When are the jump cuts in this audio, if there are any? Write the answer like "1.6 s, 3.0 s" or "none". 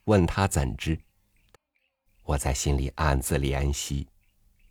1.5 s

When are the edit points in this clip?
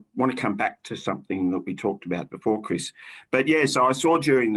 2.3 s

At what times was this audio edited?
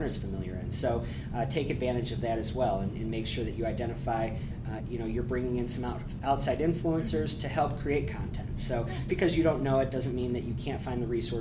4.8 s, 9.1 s

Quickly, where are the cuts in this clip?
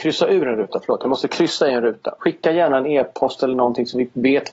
2.2 s

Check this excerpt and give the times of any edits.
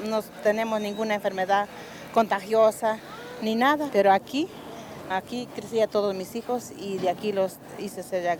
3.9 s, 5.1 s

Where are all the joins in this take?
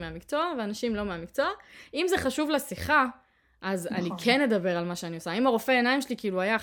none

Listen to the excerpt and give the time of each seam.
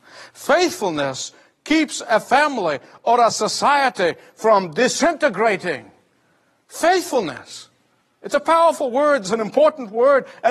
none

